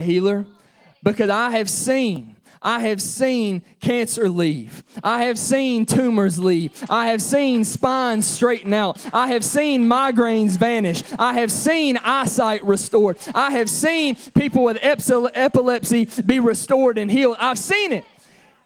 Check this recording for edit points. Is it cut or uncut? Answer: uncut